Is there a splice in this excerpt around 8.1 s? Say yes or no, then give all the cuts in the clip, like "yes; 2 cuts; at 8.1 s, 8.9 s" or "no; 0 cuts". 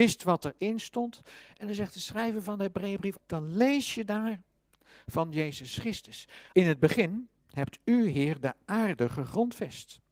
no; 2 cuts; at 3.2 s, 6.5 s